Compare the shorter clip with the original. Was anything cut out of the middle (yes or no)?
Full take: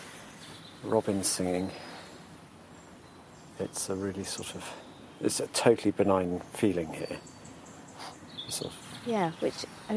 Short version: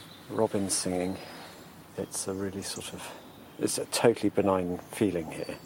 yes